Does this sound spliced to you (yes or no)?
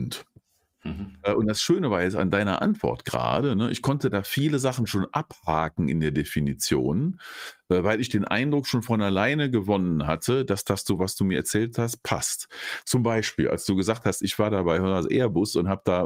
no